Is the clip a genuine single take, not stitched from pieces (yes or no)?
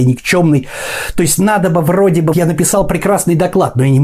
no